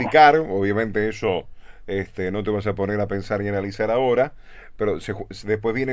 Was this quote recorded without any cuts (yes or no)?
yes